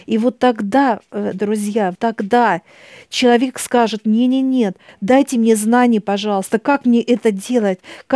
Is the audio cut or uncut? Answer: cut